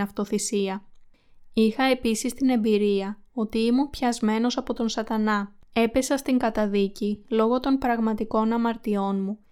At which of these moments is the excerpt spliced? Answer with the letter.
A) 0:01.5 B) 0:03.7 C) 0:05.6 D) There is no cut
C